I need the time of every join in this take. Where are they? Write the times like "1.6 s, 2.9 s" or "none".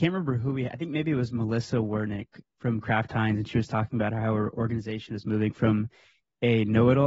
none